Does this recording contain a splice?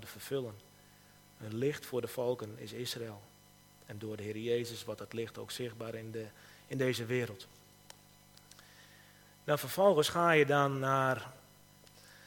no; 0 cuts

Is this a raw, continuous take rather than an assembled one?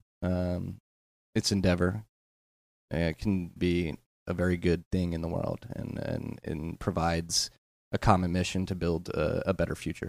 no; 1 cut; at 3.6 s

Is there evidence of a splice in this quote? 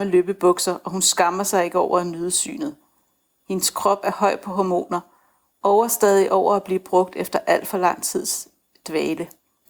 no; 0 cuts

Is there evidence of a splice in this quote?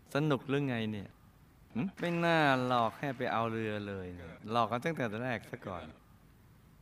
yes; 2 cuts; at 1.9 s, 4.4 s

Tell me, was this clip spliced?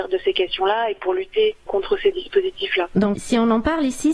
yes; 1 cut; at 2.9 s

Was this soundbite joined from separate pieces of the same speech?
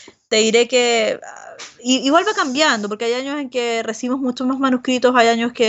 no; 0 cuts

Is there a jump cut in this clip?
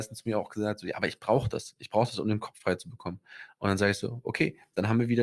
no; 0 cuts

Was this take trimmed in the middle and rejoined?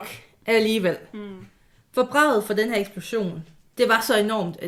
no; 0 cuts

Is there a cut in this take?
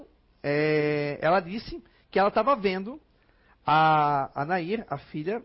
no; 0 cuts

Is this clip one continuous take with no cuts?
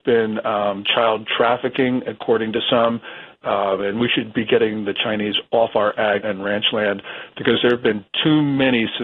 no; 2 cuts; at 3.4 s, 6.2 s

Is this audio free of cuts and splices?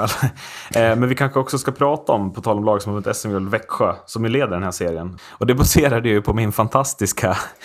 no; 1 cut; at 5.2 s

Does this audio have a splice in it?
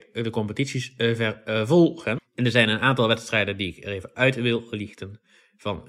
yes; 1 cut; at 2.2 s

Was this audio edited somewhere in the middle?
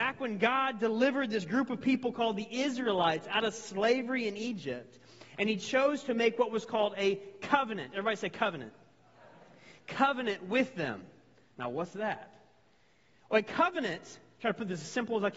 no; 0 cuts

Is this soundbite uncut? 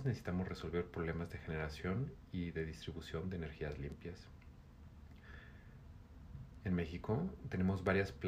yes; 0 cuts

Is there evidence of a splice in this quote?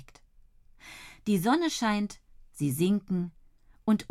no; 0 cuts

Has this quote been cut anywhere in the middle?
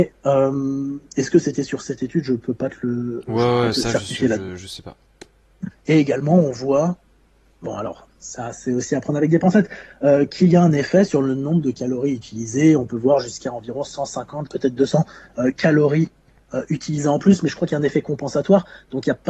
yes; 2 cuts; at 5.7 s, 14.5 s

